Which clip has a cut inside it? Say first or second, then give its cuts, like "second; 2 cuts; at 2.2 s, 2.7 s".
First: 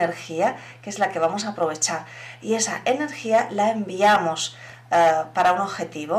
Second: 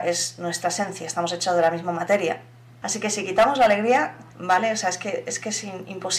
second; 2 cuts; at 2.8 s, 4.3 s